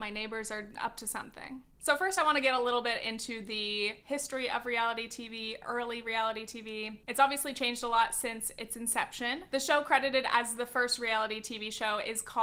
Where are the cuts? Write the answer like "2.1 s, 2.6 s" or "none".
none